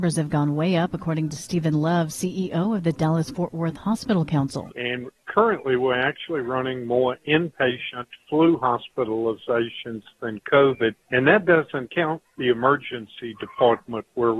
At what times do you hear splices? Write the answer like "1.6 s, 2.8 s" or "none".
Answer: 4.7 s, 11.0 s